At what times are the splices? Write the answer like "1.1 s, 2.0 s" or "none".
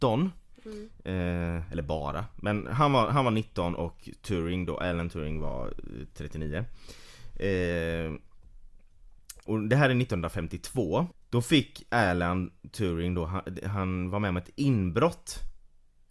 9.5 s, 11.1 s